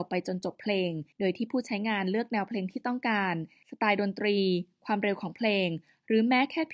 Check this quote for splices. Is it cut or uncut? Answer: cut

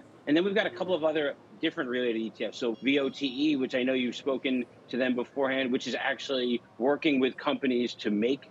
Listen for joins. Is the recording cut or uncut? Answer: cut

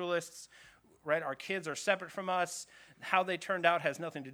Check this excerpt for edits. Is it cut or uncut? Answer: uncut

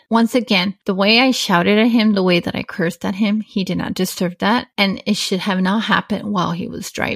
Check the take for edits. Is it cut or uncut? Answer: uncut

